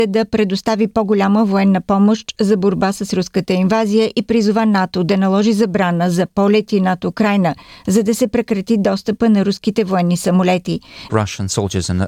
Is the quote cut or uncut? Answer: cut